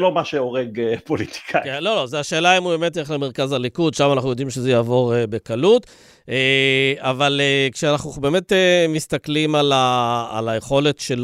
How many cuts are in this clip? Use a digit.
0